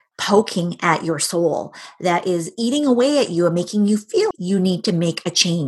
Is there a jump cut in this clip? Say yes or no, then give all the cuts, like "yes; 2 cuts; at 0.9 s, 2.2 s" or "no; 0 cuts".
yes; 1 cut; at 4.3 s